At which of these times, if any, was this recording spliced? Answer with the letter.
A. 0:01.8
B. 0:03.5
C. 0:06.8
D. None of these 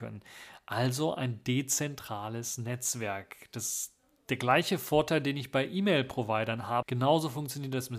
C